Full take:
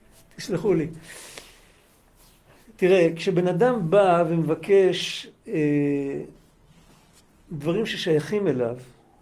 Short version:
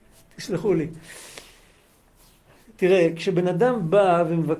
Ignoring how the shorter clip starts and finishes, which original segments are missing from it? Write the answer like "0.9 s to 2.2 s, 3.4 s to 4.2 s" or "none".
none